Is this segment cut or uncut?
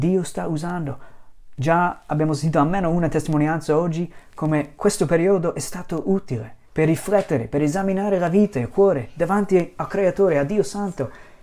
cut